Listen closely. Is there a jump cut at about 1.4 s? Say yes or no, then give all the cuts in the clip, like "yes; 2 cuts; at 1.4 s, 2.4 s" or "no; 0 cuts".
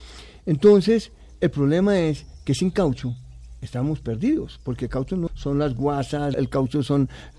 no; 2 cuts; at 5.3 s, 6.3 s